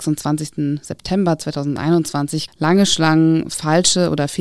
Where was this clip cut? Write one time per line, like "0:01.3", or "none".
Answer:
0:02.5